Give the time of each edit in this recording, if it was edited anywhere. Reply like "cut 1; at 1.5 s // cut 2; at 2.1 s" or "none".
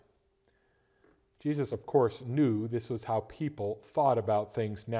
none